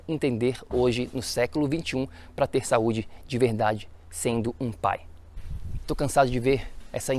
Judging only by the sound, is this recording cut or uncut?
cut